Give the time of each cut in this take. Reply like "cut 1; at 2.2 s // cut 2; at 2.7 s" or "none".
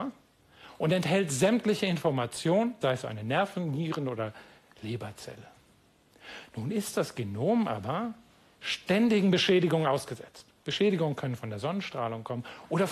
cut 1; at 2.8 s